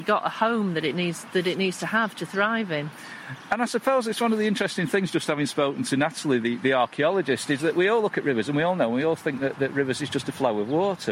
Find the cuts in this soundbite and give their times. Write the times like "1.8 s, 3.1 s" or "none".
none